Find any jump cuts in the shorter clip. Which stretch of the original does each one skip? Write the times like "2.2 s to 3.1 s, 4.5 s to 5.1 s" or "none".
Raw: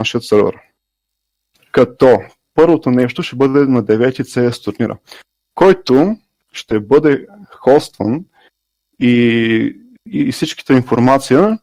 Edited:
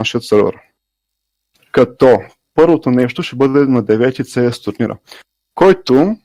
none